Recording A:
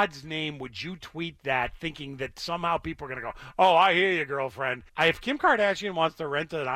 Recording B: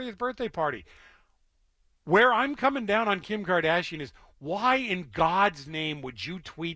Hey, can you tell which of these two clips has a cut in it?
A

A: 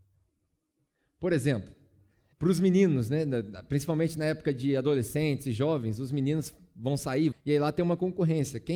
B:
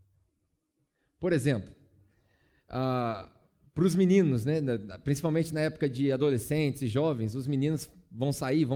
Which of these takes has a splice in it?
A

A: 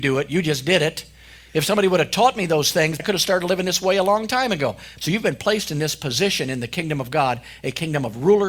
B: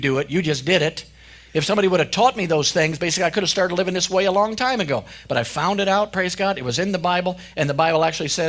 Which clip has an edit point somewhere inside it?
A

